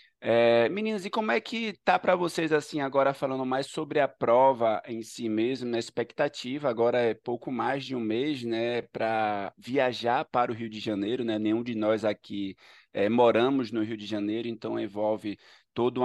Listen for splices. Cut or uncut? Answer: uncut